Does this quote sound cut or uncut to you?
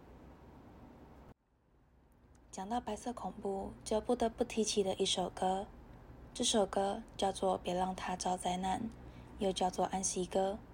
uncut